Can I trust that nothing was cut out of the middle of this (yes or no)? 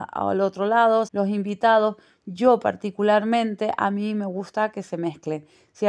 no